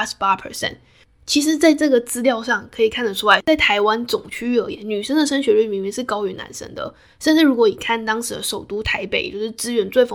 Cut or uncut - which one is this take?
uncut